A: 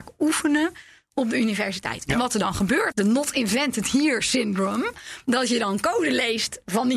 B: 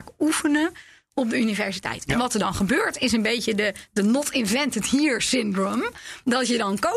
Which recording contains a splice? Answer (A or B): A